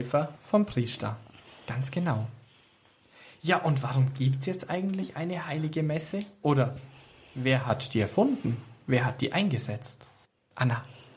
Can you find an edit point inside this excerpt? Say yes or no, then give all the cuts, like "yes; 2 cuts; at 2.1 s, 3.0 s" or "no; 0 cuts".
no; 0 cuts